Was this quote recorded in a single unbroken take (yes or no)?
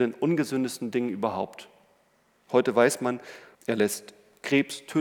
no